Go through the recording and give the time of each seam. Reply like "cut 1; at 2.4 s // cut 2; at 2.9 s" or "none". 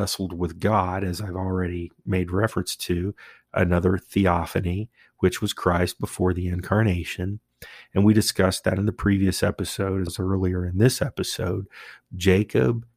cut 1; at 10.1 s // cut 2; at 12.0 s